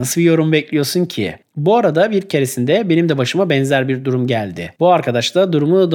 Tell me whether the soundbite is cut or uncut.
cut